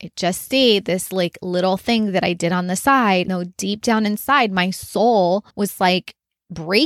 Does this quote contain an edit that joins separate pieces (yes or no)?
yes